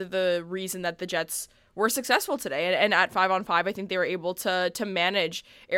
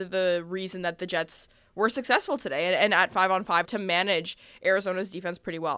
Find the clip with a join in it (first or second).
second